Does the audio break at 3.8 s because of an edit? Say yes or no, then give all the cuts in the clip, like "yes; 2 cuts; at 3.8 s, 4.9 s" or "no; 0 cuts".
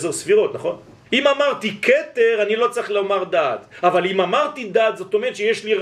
no; 1 cut; at 1.0 s